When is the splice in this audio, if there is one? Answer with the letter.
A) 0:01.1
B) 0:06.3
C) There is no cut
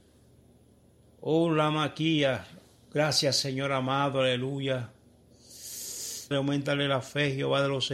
B